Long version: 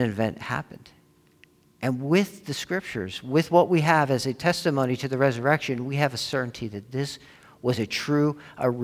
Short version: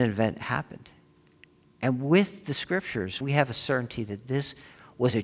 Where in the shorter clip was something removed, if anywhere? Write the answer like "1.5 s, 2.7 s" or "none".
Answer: 3.2 s